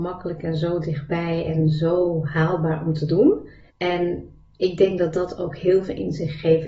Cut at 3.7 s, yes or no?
yes